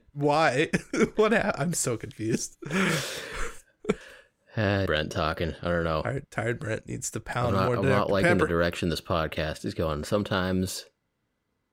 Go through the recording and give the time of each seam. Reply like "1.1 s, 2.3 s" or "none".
4.9 s